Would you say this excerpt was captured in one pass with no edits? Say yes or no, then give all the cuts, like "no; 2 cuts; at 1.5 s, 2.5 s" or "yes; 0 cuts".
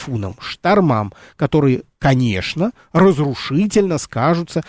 yes; 0 cuts